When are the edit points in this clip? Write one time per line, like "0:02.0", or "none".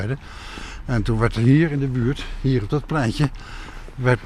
none